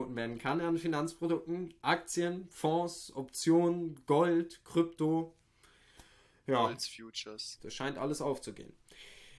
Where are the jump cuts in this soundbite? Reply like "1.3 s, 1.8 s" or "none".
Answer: 7.6 s